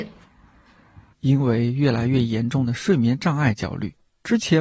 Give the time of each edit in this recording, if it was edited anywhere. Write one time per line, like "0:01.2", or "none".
0:01.1